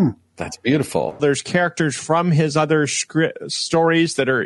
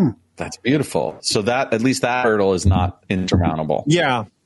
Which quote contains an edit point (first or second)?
first